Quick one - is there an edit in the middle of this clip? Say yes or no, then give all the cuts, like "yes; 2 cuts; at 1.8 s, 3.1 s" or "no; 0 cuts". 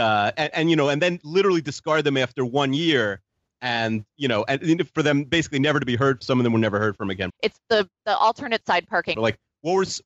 yes; 3 cuts; at 6.2 s, 7.3 s, 9.1 s